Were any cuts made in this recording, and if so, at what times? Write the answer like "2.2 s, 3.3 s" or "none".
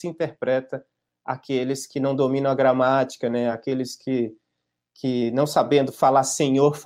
none